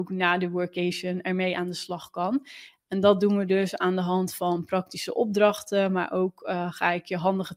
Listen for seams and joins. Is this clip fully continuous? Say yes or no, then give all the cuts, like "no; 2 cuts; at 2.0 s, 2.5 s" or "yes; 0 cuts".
no; 1 cut; at 2.7 s